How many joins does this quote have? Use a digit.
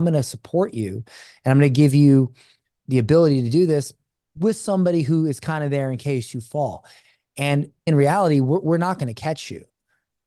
1